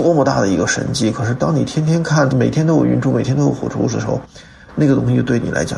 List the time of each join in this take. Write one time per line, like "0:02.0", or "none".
0:02.3